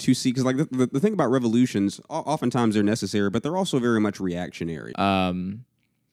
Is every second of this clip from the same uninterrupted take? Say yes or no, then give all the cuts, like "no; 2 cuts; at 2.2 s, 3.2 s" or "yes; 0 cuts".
no; 1 cut; at 4.9 s